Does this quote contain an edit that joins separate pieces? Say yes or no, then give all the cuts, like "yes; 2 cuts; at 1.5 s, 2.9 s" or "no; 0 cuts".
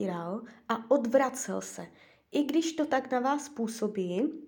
no; 0 cuts